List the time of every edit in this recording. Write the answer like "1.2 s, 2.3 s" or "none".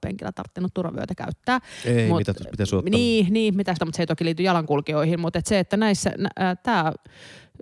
3.8 s